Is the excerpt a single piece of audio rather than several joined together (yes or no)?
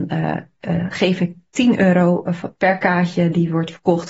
yes